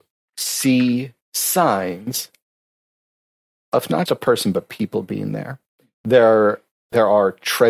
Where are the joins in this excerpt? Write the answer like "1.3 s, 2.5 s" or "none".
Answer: 4.1 s